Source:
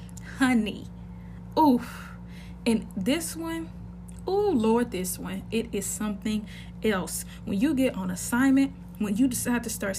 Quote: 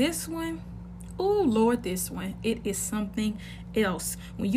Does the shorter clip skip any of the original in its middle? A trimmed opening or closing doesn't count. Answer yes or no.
no